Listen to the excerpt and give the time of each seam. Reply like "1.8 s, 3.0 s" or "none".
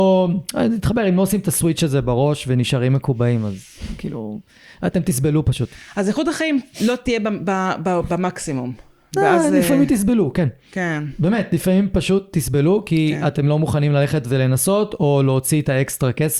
none